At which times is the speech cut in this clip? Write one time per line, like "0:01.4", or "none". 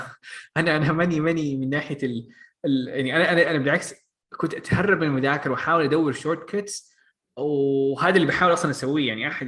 none